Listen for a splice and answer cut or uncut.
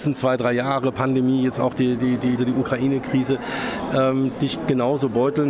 cut